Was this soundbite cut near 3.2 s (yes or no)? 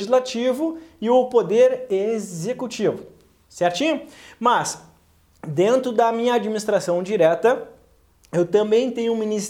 no